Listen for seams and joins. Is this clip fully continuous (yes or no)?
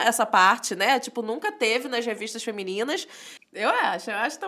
no